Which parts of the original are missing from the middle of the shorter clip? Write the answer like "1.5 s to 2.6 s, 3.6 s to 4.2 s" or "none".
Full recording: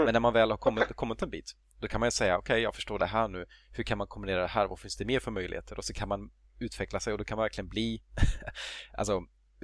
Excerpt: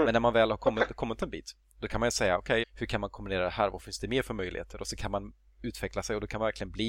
2.6 s to 3.6 s